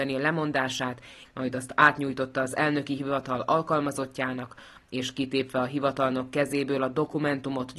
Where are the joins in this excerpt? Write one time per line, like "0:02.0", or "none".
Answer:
0:01.2
0:04.8